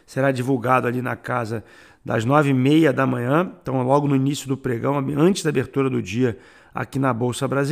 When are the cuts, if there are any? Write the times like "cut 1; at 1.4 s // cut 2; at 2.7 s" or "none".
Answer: none